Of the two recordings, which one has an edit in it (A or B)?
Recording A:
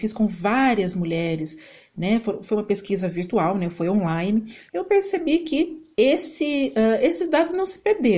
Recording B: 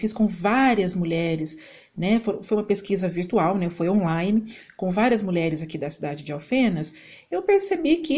A